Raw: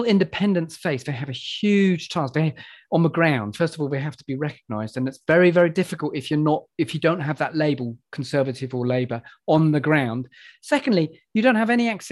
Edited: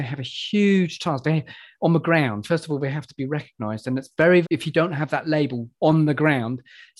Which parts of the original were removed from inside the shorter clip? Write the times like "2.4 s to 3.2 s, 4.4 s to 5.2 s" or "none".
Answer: 5.5 s to 6.7 s, 8.0 s to 9.4 s